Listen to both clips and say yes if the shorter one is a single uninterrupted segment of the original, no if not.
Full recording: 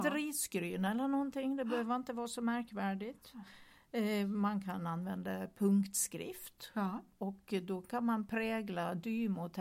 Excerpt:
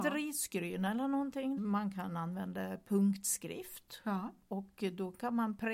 no